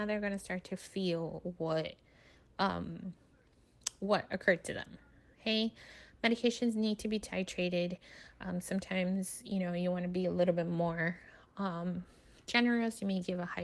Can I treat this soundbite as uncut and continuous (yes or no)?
yes